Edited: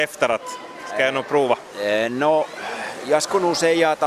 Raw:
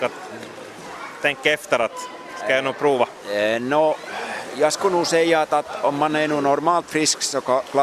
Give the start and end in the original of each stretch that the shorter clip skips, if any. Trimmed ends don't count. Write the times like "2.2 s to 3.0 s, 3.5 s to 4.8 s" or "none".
none